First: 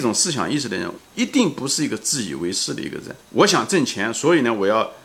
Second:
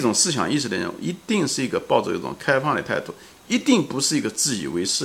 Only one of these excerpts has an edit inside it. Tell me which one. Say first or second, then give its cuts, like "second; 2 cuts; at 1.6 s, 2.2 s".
first; 2 cuts; at 1.0 s, 3.2 s